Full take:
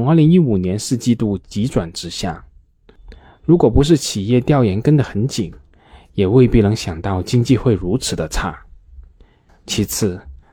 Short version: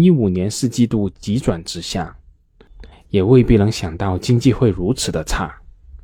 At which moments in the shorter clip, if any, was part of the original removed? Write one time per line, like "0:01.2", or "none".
0:02.9